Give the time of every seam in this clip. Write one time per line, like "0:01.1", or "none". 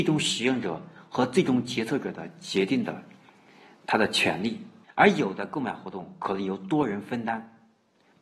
0:04.8